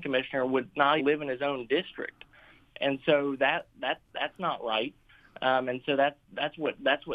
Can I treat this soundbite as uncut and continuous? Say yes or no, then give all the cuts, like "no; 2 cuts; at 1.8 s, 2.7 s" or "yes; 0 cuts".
no; 1 cut; at 1.0 s